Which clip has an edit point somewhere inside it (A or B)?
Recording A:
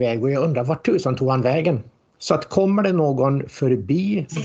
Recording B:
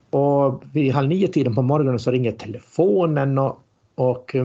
A